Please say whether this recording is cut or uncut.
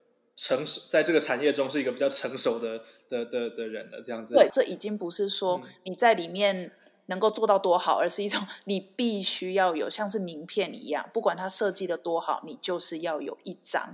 cut